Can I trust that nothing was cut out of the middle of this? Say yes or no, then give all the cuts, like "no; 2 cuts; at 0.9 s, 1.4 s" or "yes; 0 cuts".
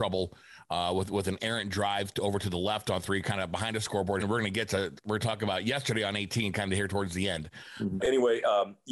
no; 2 cuts; at 4.2 s, 8.0 s